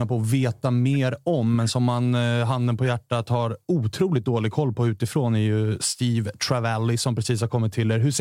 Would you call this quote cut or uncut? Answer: uncut